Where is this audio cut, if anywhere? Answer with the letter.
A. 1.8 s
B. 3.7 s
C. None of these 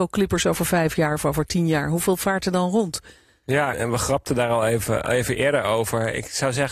B